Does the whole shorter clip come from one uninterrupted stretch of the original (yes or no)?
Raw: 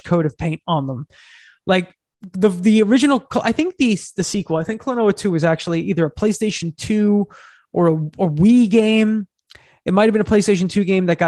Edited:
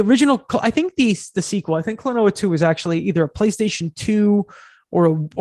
yes